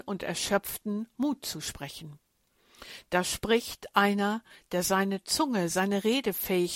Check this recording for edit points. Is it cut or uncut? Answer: uncut